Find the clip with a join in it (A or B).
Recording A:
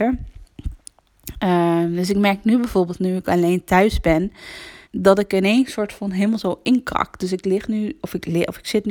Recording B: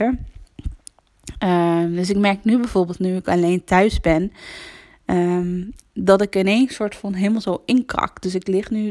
A